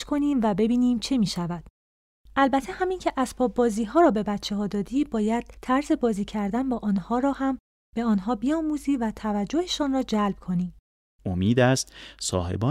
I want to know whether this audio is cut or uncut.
cut